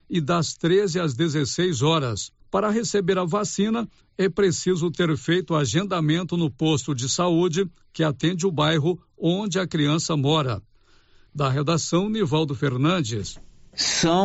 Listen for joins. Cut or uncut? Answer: cut